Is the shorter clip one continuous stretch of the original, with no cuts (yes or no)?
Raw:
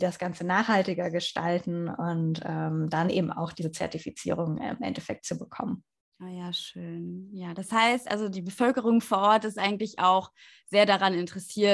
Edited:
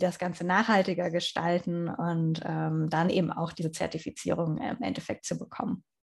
yes